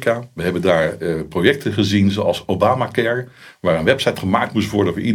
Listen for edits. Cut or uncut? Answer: uncut